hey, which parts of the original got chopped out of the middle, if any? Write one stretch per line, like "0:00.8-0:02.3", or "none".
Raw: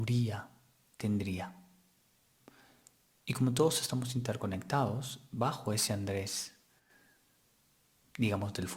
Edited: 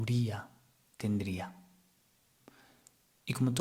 none